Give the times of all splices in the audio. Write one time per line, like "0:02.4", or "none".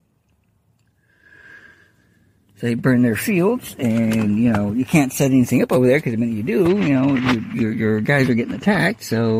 none